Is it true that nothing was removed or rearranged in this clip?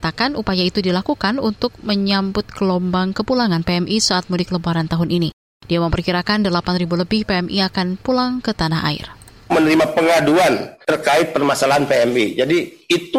yes; 0 cuts

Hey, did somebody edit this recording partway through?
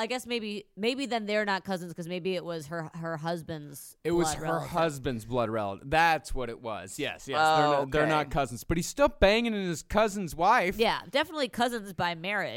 no; 0 cuts

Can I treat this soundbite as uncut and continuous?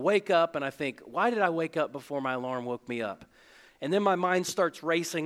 yes; 0 cuts

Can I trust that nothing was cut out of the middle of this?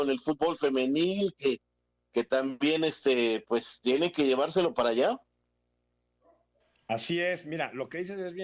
yes; 0 cuts

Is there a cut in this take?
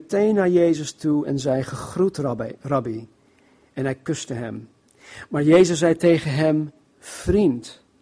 no; 0 cuts

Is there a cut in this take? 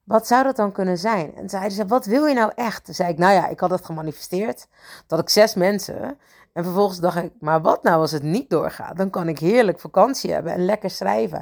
no; 0 cuts

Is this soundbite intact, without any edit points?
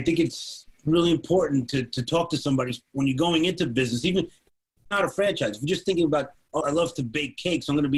no; 1 cut; at 6.6 s

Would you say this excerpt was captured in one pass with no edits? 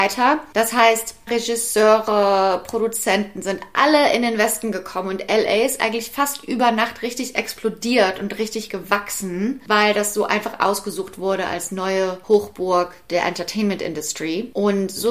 no; 1 cut; at 1.3 s

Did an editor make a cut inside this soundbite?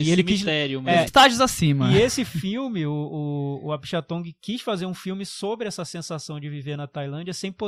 yes; 1 cut; at 1.1 s

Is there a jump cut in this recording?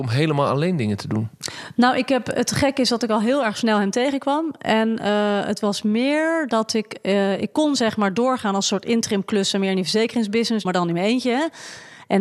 yes; 1 cut; at 10.6 s

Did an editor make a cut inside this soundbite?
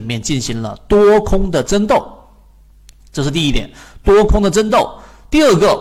no; 0 cuts

